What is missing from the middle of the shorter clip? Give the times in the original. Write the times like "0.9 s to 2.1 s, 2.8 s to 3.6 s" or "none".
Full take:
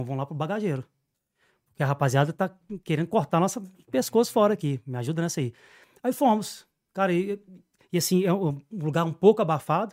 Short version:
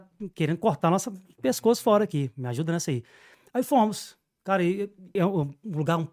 7.6 s to 8.2 s